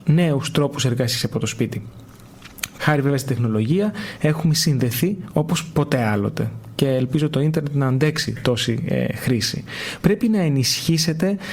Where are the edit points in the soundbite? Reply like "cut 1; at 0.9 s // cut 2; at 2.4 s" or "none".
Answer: cut 1; at 2.8 s // cut 2; at 10.0 s